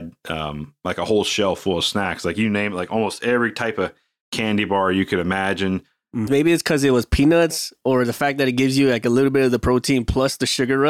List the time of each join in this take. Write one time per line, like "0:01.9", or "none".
0:06.3